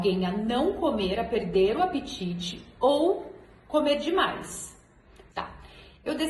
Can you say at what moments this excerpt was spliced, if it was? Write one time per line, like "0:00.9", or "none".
0:05.3